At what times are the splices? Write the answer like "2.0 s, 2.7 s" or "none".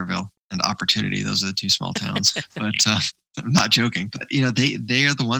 none